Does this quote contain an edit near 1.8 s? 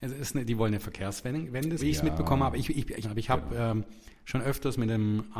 yes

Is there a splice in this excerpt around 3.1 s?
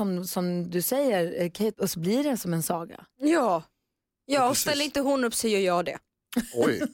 no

